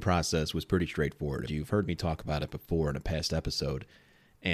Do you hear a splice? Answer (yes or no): yes